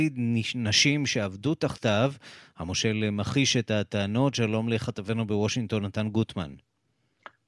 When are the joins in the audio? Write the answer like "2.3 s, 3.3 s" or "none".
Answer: none